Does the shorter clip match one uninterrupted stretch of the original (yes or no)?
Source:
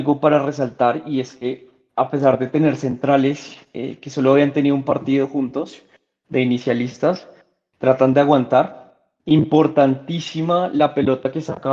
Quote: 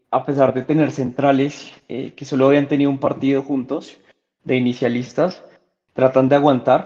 yes